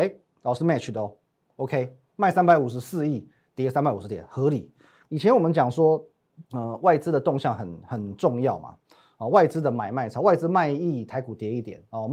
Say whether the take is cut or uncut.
cut